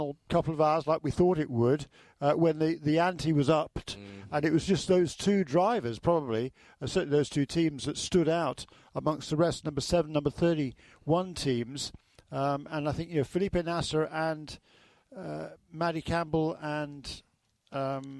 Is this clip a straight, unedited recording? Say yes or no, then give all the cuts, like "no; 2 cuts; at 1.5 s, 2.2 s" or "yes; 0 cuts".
yes; 0 cuts